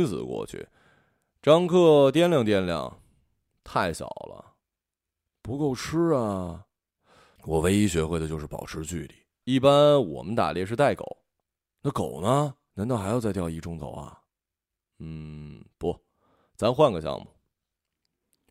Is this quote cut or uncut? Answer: cut